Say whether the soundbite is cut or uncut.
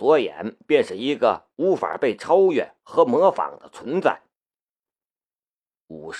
uncut